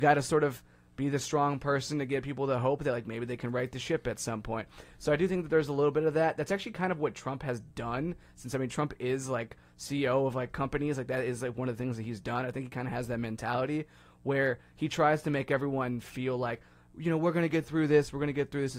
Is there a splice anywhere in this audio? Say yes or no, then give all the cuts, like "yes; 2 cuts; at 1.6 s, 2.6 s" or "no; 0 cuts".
no; 0 cuts